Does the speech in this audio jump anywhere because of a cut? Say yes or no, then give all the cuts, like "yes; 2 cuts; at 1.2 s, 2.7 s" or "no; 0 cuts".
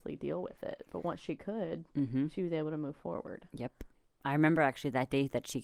no; 0 cuts